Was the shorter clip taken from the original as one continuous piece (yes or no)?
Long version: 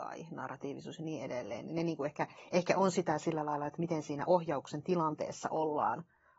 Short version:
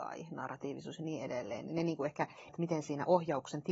no